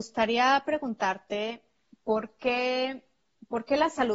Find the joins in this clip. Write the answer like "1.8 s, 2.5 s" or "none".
none